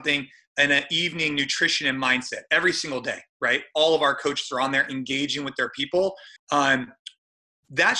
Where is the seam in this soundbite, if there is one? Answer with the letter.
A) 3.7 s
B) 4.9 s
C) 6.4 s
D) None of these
C